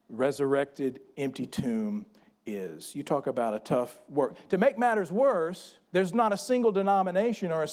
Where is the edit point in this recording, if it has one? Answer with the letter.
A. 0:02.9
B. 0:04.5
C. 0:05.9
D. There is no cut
C